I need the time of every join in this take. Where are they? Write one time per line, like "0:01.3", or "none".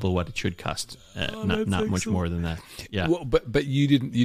none